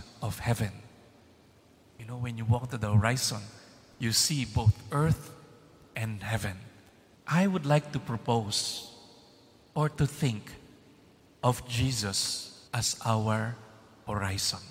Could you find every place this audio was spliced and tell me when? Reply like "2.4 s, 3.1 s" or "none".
7.1 s, 9.9 s, 12.7 s